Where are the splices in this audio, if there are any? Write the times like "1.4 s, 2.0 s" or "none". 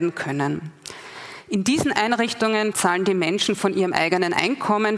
2.7 s